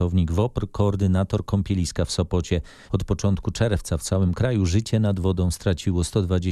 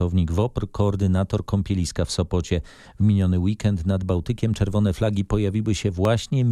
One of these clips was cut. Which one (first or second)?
first